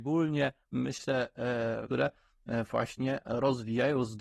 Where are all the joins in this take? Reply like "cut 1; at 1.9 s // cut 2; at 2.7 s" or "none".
cut 1; at 1.9 s